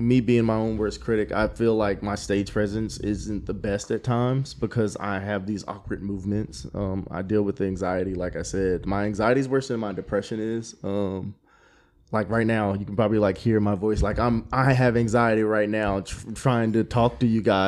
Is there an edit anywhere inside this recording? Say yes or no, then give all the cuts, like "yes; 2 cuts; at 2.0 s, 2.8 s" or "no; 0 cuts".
no; 0 cuts